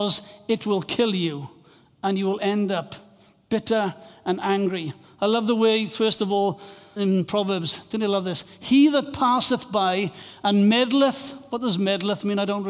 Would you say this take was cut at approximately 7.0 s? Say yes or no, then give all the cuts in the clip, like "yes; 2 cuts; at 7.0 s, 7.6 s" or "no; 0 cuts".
yes; 1 cut; at 7.0 s